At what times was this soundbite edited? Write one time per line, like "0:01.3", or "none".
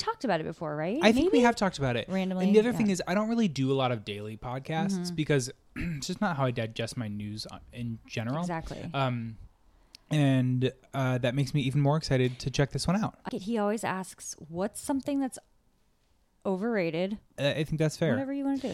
0:13.3
0:17.3